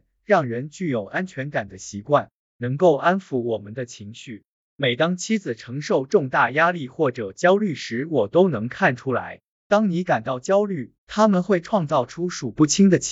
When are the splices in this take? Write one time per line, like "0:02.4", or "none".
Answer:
0:04.6
0:09.5
0:10.9